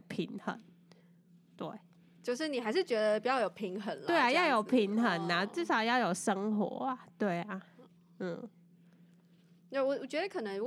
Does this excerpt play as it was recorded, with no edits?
yes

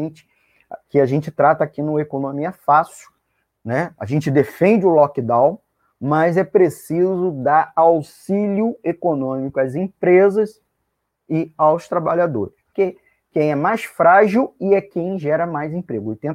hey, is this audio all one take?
no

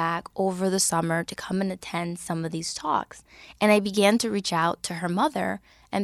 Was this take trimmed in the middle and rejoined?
no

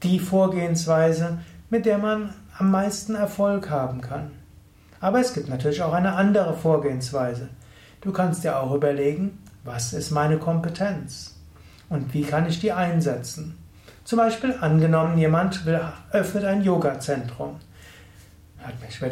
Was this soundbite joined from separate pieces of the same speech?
no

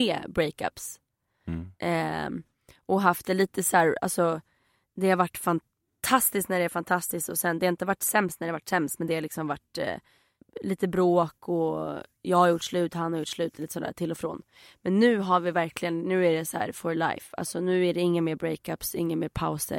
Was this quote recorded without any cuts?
yes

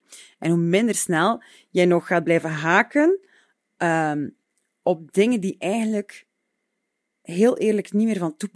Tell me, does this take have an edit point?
no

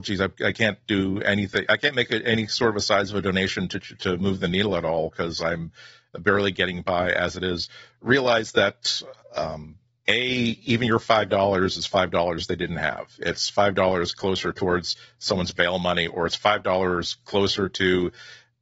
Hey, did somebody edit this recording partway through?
no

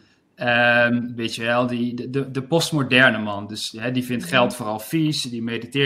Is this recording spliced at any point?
yes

